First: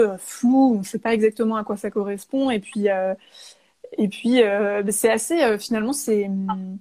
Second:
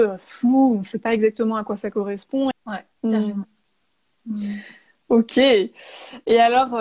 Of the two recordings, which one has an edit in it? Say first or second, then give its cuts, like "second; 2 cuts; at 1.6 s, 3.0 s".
second; 1 cut; at 2.5 s